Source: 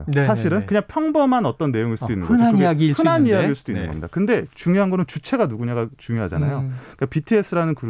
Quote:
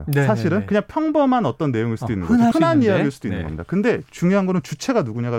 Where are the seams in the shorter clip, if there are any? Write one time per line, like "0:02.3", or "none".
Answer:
0:02.5